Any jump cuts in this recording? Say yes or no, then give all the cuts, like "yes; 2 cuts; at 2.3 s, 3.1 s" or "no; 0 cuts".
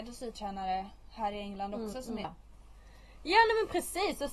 yes; 1 cut; at 2.2 s